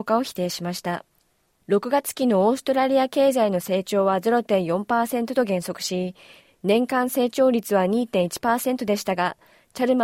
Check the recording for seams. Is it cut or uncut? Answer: uncut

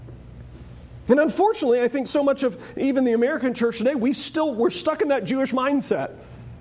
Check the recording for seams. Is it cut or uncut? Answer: uncut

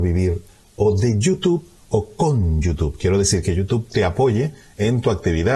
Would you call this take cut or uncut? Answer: uncut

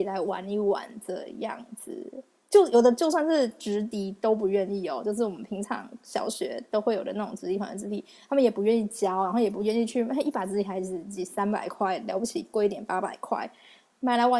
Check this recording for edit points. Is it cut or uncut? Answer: uncut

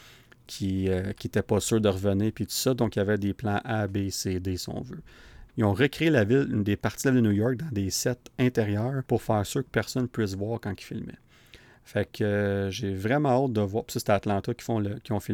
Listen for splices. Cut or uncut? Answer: cut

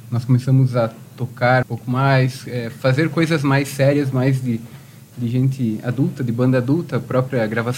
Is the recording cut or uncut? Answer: cut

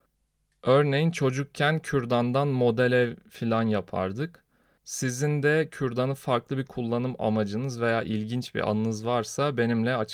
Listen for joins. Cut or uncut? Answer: cut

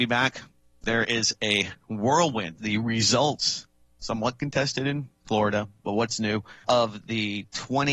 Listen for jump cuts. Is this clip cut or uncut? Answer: cut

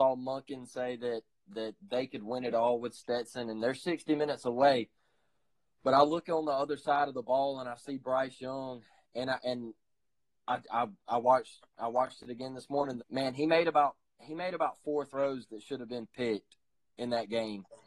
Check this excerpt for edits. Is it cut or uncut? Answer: cut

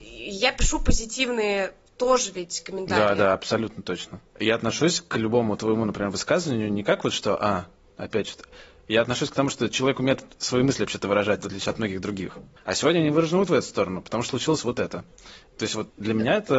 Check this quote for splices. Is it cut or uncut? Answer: cut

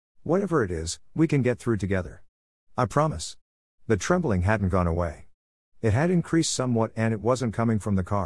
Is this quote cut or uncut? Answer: uncut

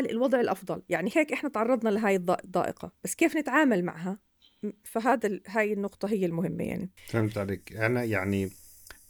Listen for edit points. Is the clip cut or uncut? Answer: cut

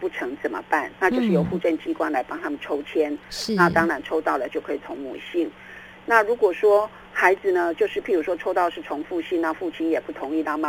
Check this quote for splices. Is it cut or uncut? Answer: uncut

